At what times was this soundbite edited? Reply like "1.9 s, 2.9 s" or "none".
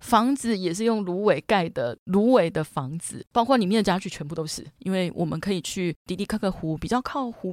4.8 s